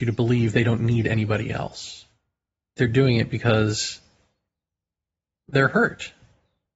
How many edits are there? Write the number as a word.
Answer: one